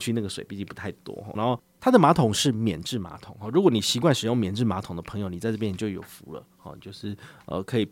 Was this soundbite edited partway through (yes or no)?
yes